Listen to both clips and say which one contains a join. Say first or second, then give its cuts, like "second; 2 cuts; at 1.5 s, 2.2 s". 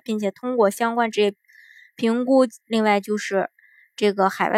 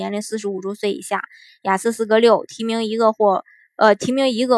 first; 1 cut; at 2.6 s